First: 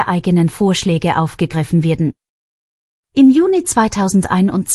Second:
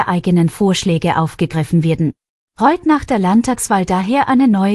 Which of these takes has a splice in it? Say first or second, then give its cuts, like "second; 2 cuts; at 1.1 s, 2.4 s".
second; 1 cut; at 2.4 s